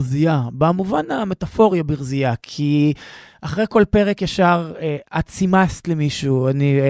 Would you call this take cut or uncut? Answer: uncut